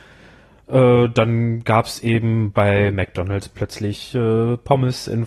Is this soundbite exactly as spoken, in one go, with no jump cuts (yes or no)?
yes